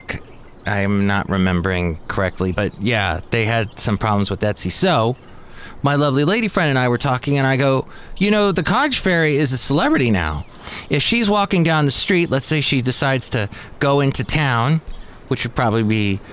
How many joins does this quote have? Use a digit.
0